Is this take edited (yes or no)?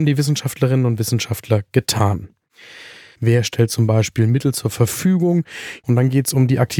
yes